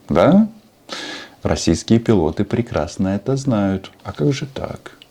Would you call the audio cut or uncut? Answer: cut